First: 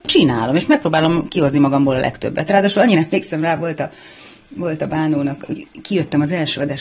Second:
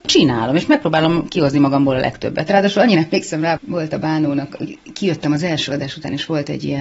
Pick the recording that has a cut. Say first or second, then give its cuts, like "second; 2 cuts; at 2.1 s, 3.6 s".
second; 1 cut; at 3.6 s